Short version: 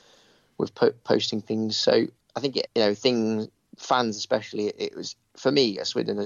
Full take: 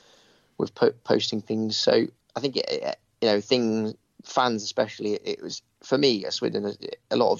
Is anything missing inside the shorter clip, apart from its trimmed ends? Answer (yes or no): yes